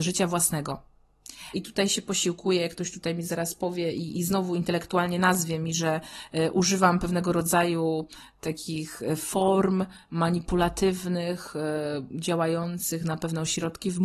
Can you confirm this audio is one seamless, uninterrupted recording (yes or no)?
no